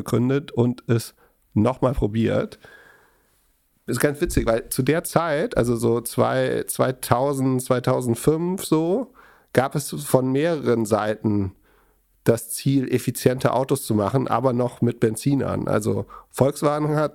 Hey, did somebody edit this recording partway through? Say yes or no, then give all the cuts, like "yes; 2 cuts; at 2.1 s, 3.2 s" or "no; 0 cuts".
no; 0 cuts